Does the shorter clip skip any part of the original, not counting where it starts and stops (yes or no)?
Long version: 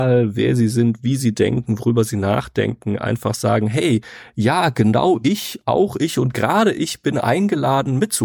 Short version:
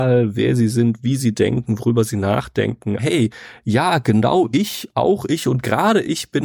yes